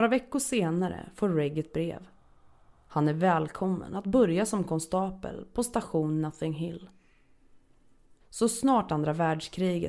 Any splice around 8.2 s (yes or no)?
yes